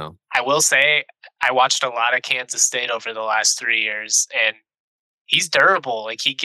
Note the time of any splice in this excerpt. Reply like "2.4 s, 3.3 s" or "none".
none